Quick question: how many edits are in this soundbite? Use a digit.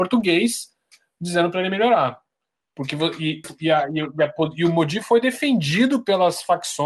1